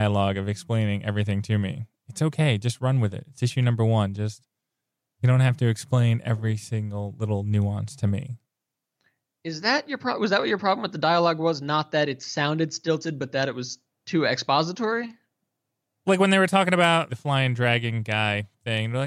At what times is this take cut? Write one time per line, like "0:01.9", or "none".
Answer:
0:17.1